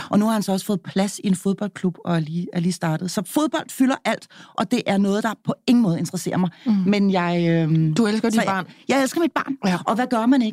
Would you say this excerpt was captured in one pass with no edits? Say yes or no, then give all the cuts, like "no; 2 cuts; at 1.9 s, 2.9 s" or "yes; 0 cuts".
yes; 0 cuts